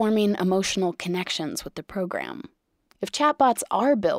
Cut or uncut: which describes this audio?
cut